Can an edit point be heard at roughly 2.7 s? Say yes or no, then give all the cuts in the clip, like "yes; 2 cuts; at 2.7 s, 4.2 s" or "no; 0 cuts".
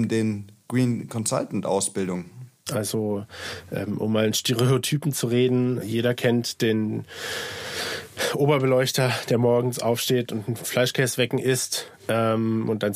yes; 2 cuts; at 2.7 s, 5.8 s